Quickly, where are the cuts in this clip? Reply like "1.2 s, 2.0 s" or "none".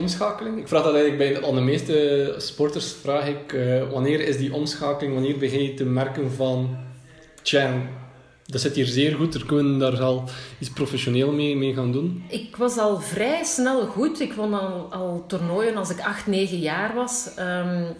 none